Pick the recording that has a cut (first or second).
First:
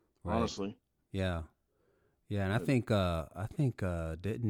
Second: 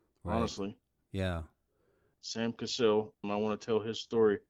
second